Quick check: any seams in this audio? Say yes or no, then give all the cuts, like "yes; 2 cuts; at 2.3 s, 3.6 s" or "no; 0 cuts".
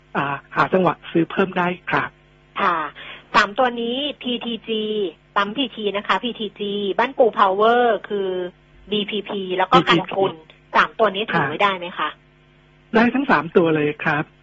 no; 0 cuts